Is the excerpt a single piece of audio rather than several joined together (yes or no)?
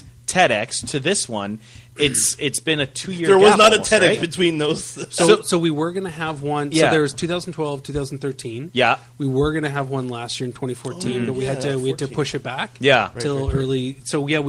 yes